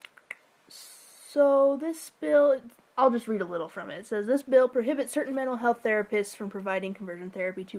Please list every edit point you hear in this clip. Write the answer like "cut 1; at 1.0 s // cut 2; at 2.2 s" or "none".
none